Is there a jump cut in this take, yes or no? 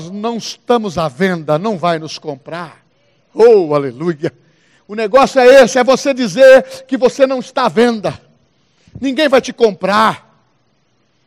no